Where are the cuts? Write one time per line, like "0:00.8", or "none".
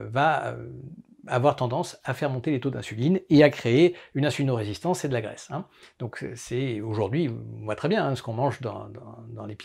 none